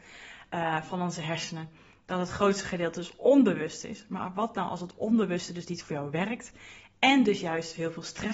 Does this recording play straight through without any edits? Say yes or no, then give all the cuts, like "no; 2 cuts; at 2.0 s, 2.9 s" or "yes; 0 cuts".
yes; 0 cuts